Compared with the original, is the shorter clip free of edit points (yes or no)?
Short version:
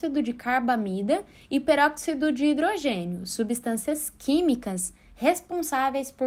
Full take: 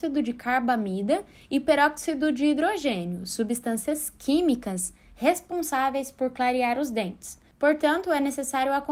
yes